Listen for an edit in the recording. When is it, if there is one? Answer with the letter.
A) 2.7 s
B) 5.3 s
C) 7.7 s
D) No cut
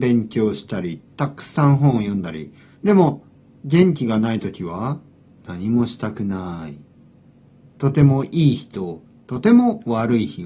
C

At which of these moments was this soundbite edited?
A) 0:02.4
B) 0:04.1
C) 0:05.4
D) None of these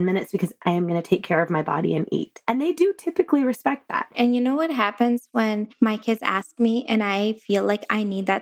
B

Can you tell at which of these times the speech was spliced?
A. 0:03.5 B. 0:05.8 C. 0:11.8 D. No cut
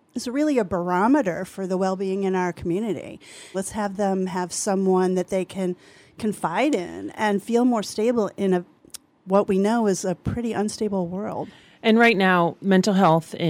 A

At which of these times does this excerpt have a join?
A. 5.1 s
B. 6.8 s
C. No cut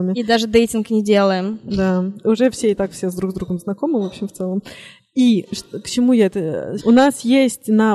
B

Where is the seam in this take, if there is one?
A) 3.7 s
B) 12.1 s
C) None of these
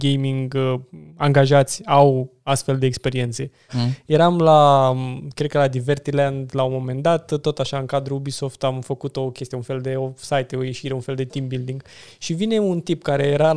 A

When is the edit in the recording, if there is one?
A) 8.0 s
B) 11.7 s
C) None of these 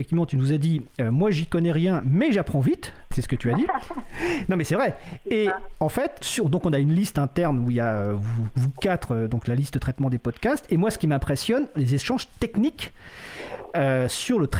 B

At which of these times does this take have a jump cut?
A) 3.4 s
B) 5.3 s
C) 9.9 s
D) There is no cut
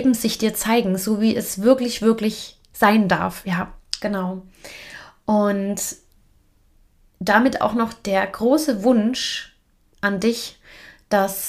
D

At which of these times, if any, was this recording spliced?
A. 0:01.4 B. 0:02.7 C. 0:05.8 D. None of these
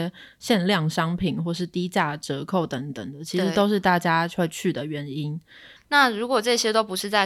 C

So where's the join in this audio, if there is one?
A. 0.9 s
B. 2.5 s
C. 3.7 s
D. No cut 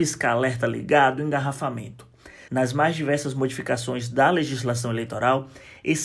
B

